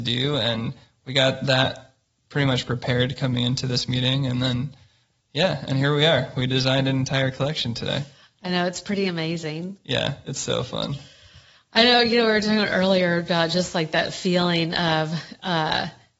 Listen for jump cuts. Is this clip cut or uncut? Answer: cut